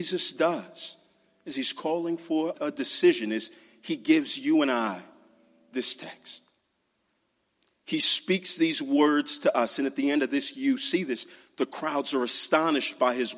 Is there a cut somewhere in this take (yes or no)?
yes